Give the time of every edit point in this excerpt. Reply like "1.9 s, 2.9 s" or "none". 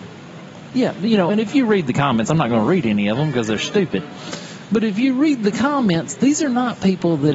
none